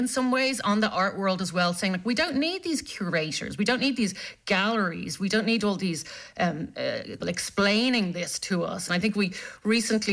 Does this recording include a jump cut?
yes; 2 cuts; at 7.2 s, 8.9 s

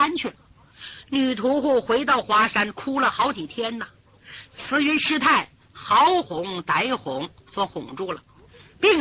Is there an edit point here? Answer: no; 0 cuts

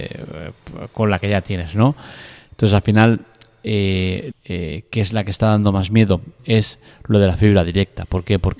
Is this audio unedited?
no; 2 cuts; at 4.3 s, 6.4 s

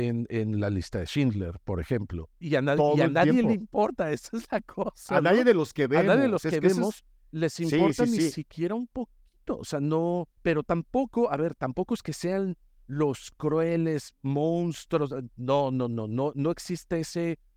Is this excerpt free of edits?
no; 2 cuts; at 2.4 s, 10.4 s

